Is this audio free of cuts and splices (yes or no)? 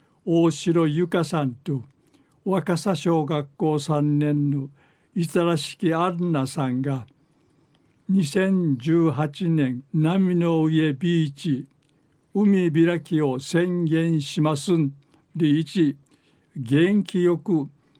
no